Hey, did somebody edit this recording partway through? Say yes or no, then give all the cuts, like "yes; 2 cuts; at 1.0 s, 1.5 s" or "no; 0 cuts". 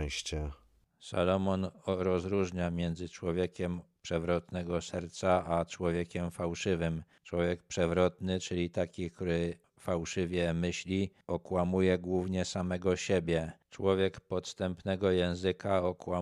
no; 0 cuts